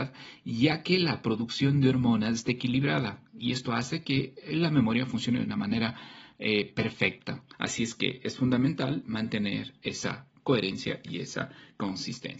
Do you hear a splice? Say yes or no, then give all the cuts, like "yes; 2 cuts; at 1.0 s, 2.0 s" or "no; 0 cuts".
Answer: yes; 1 cut; at 7.5 s